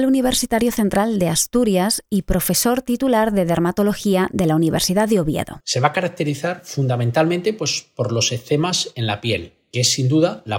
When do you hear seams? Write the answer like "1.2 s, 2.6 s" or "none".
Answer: 5.6 s